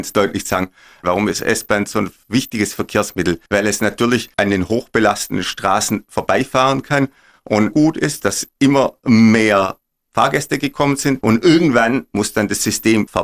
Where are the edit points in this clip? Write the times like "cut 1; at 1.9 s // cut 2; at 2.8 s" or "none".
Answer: cut 1; at 1.0 s // cut 2; at 3.5 s // cut 3; at 7.7 s